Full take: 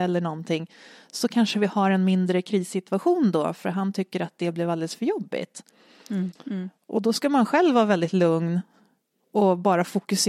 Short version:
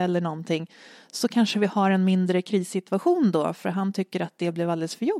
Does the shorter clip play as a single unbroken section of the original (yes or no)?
yes